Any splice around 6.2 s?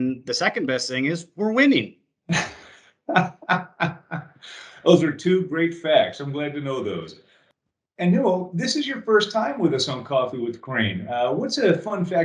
no; 0 cuts

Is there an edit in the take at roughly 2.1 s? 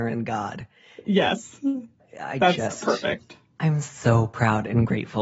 no; 1 cut; at 3.6 s

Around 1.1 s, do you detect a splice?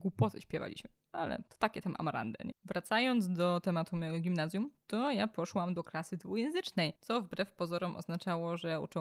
no; 1 cut; at 2.5 s

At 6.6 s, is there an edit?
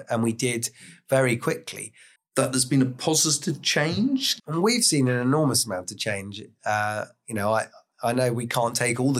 no; 2 cuts; at 2.2 s, 4.4 s

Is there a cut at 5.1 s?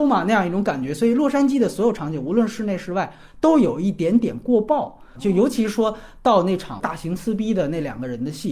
yes; 1 cut; at 5.1 s

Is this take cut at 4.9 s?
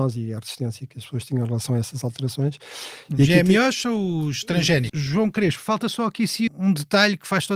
yes; 2 cuts; at 4.9 s, 6.5 s

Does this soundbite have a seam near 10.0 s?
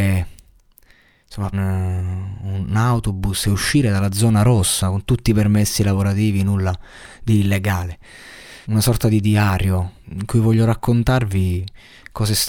yes; 3 cuts; at 1.5 s, 8.6 s, 10.0 s

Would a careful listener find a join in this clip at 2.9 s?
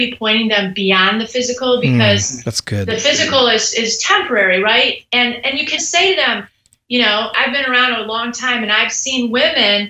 no; 2 cuts; at 5.8 s, 7.3 s

